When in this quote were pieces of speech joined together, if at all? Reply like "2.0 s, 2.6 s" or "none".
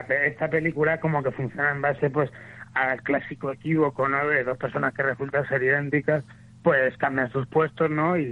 none